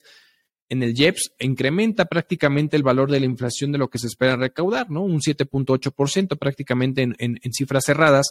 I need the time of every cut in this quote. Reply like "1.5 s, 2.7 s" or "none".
1.4 s